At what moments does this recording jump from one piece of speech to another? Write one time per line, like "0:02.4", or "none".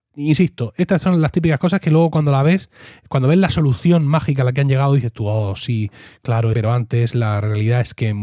0:06.5